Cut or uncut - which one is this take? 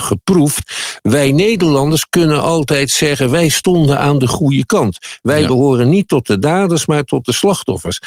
uncut